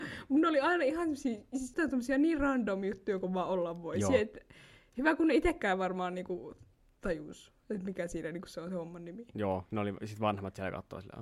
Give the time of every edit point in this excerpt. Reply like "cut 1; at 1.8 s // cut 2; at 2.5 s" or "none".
cut 1; at 1.7 s